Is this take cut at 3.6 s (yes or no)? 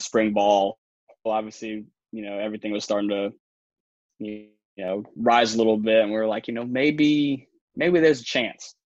no